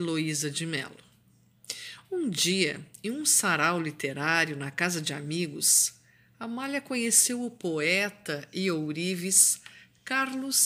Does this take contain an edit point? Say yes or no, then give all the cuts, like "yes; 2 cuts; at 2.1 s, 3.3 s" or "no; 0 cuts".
no; 0 cuts